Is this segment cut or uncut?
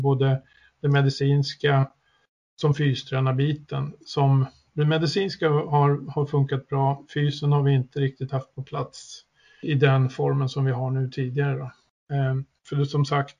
cut